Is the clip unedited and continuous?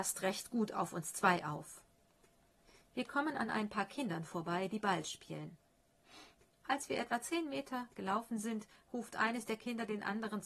yes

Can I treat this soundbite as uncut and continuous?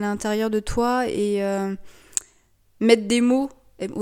yes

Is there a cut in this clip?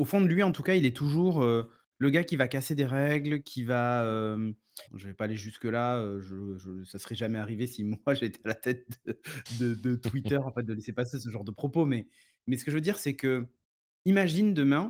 yes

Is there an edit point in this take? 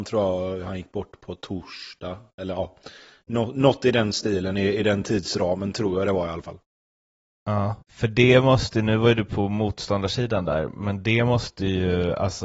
yes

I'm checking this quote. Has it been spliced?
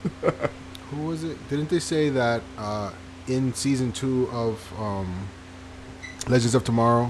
yes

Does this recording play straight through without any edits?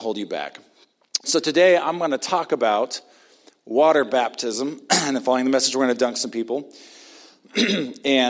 yes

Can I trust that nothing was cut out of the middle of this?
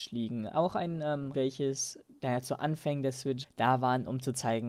no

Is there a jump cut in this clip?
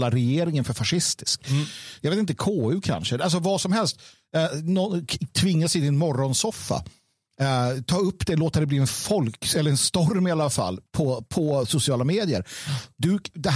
no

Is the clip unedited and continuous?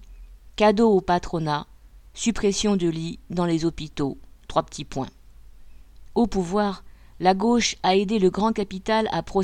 yes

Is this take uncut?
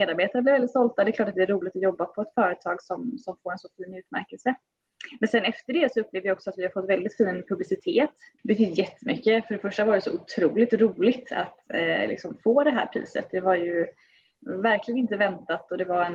no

